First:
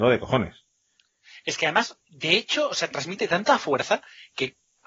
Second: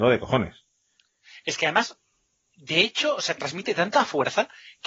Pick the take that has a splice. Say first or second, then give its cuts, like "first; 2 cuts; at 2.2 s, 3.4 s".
first; 1 cut; at 2.0 s